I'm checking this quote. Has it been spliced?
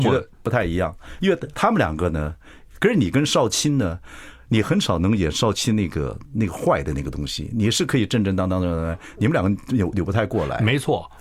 yes; 1 cut; at 2.8 s

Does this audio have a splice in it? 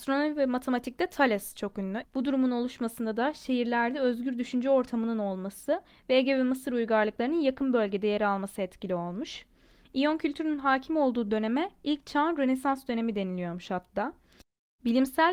yes; 1 cut; at 2.0 s

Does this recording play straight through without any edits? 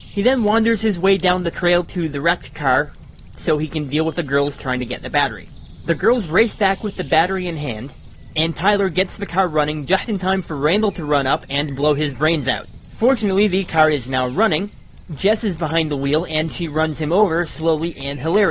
yes; 0 cuts

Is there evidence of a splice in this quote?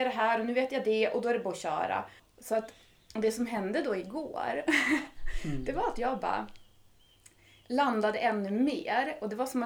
no; 0 cuts

